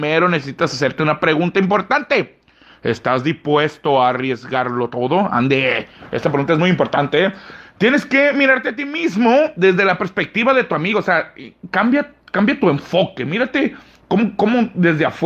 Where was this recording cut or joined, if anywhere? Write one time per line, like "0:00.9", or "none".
none